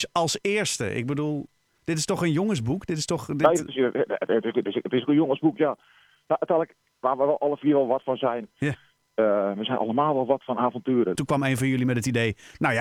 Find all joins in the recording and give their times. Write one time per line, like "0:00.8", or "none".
0:08.5
0:11.1

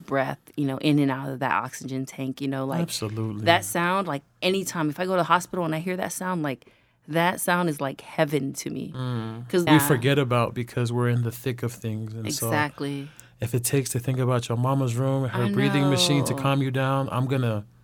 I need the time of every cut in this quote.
0:09.7

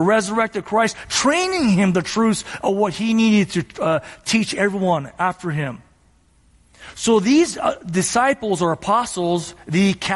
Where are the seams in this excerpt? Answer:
none

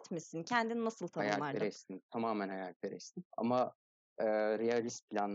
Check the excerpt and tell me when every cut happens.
0:03.3

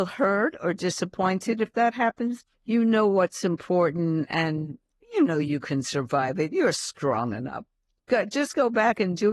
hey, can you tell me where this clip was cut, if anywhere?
0:02.5

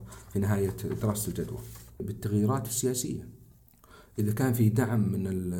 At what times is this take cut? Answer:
0:02.0

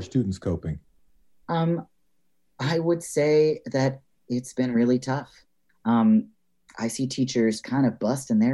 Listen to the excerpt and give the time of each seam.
0:05.7
0:07.6

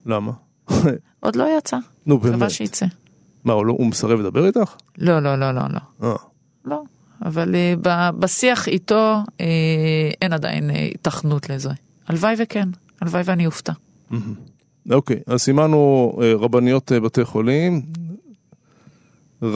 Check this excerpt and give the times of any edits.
none

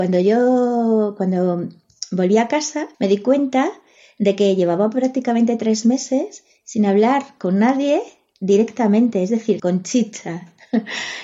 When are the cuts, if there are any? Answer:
0:02.9
0:09.6

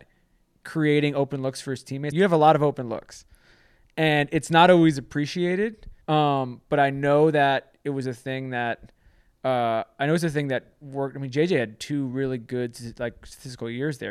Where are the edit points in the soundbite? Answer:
0:02.1
0:06.0

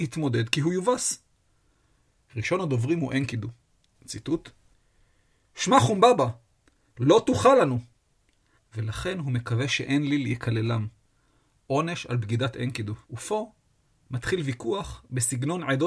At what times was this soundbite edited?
0:08.6
0:13.0

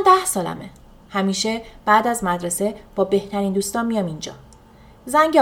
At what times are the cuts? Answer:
0:01.0

